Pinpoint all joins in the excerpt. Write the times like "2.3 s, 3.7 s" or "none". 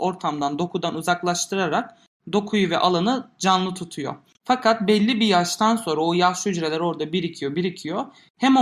7.5 s